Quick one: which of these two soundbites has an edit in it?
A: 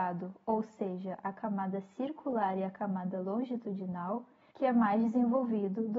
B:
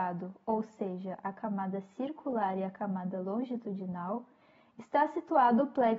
A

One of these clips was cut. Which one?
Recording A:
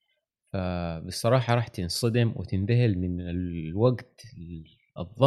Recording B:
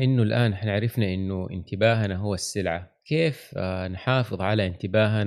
B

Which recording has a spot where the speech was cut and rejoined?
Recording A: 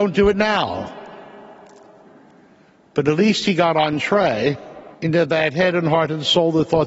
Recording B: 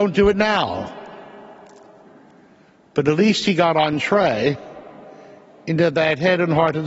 A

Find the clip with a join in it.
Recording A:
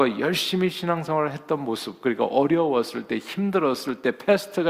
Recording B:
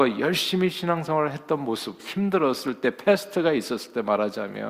B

